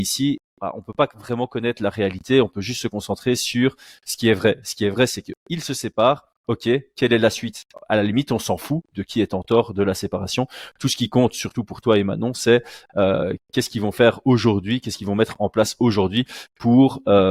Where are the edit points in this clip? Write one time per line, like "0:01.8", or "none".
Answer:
none